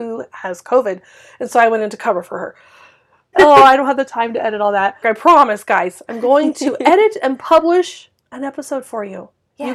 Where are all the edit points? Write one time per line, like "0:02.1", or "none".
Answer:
0:03.3
0:05.0